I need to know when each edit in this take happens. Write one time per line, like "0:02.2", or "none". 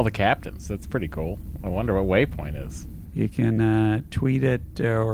0:03.1